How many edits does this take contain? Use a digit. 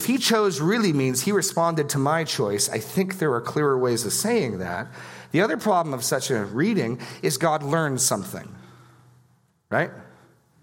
0